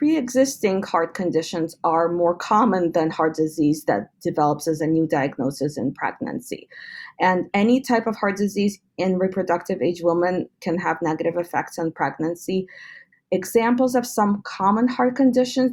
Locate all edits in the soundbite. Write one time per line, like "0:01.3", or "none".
0:07.5
0:13.1